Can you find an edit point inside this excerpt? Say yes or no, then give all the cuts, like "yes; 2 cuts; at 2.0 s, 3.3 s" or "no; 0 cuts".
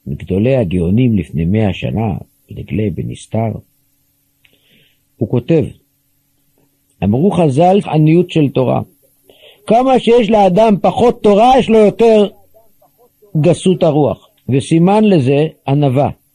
yes; 2 cuts; at 7.8 s, 14.4 s